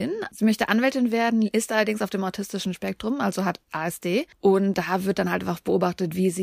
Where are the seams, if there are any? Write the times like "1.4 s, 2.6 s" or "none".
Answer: none